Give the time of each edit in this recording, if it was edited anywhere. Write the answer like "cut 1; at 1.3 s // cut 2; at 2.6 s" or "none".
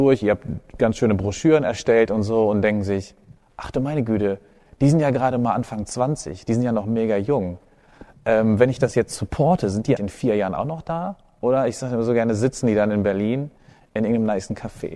cut 1; at 10.0 s